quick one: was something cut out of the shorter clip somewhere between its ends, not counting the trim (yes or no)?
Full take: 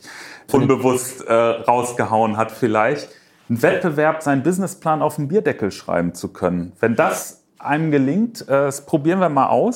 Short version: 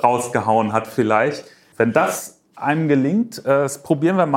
yes